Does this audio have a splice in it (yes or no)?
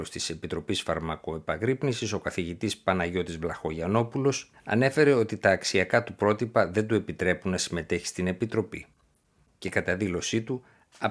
yes